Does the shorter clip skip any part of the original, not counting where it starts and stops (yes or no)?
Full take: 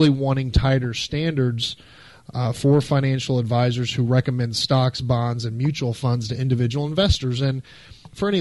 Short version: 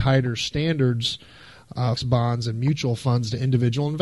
yes